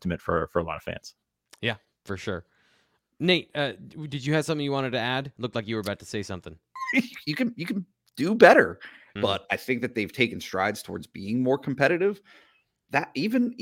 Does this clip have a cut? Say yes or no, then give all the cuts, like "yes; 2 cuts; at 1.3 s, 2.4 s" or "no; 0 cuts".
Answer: yes; 2 cuts; at 6.8 s, 9.2 s